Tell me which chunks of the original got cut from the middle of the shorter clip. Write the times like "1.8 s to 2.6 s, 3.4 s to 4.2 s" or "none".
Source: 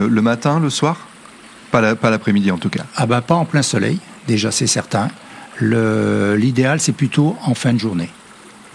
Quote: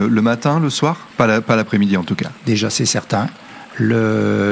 1.1 s to 1.6 s, 2.9 s to 4.2 s